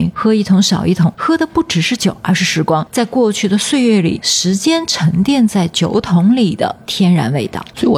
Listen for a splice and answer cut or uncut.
uncut